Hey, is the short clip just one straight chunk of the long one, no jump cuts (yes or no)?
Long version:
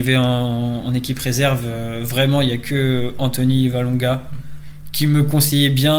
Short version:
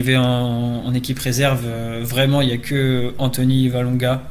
yes